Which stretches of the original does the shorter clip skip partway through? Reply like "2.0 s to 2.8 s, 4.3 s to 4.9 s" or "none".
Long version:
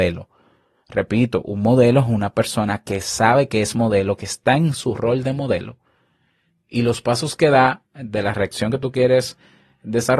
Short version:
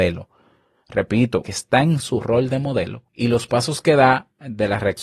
1.4 s to 4.2 s, 5.8 s to 6.6 s